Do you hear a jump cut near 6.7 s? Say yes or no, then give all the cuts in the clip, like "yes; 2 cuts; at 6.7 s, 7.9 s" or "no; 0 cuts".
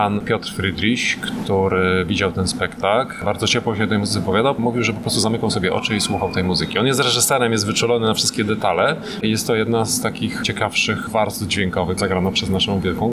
no; 2 cuts; at 9.2 s, 12.0 s